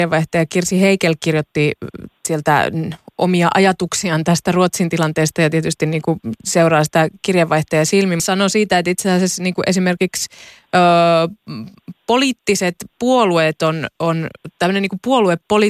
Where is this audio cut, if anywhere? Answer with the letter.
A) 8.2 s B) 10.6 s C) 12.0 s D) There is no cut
A